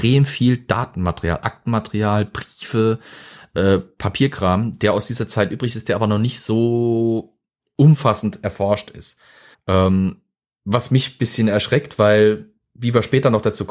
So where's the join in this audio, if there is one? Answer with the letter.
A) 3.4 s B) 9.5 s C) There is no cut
B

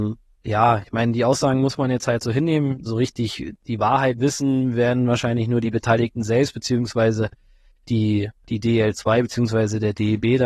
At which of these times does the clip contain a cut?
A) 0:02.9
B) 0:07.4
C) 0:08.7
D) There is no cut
A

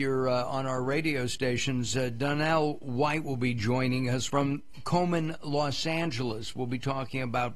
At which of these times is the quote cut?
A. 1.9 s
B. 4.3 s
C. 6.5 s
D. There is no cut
B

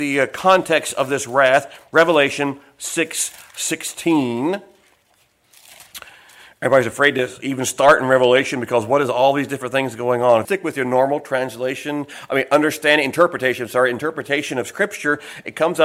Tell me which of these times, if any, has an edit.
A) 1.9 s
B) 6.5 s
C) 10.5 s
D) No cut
C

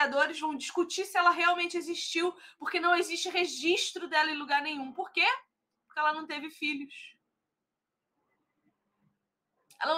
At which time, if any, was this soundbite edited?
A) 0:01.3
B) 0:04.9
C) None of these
C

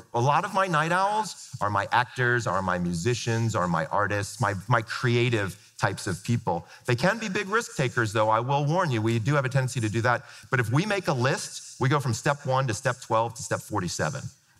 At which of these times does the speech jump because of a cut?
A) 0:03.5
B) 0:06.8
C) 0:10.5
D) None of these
D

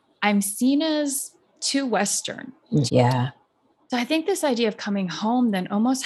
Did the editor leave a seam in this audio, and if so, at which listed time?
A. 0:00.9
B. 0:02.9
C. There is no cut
B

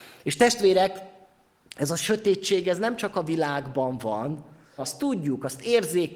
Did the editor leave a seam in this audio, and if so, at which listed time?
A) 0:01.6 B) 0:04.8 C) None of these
B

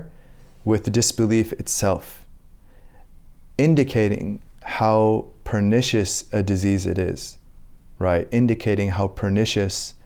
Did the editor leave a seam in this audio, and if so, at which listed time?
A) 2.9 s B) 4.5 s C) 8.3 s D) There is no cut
D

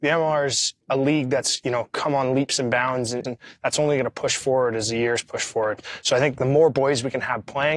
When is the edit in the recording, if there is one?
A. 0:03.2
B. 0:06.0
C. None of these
A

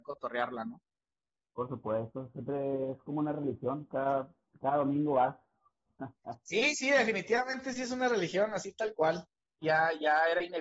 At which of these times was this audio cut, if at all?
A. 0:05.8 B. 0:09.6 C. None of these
B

